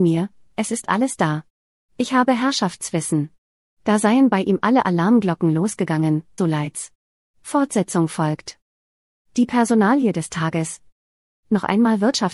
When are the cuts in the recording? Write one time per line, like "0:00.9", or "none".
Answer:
0:06.4